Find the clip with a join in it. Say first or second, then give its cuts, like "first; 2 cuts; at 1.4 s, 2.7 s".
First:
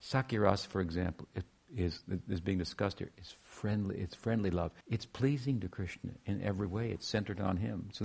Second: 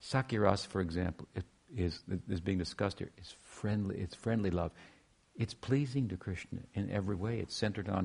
first; 1 cut; at 4.8 s